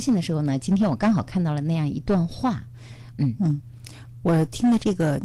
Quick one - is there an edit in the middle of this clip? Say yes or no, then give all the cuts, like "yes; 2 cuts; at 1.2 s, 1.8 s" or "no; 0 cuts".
yes; 1 cut; at 3.1 s